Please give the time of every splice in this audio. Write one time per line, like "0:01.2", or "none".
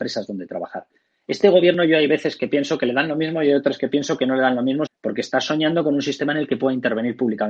0:04.9